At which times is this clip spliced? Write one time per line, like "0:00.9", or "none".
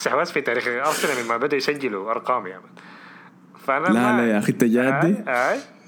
none